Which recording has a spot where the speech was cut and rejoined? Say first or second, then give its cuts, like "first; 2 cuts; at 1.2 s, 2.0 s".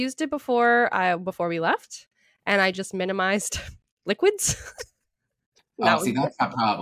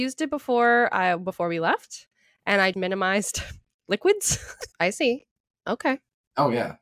second; 2 cuts; at 2.7 s, 4.7 s